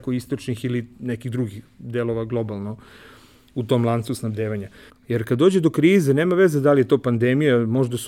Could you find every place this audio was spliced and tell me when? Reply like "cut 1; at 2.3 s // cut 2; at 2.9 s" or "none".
cut 1; at 4.9 s